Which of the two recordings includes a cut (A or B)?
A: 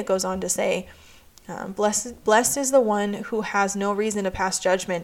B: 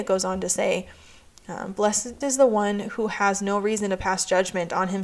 B